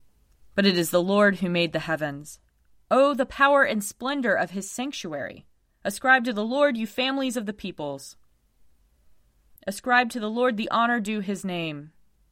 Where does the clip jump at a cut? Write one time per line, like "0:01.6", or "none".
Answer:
0:02.7
0:09.6